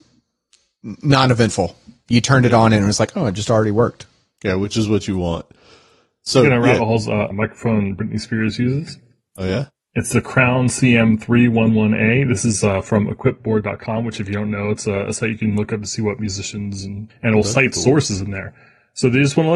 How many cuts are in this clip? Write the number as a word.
two